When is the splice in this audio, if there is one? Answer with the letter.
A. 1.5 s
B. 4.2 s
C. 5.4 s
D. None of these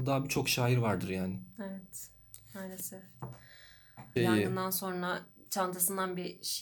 B